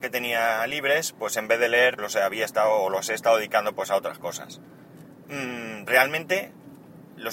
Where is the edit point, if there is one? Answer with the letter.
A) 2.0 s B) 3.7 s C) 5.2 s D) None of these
A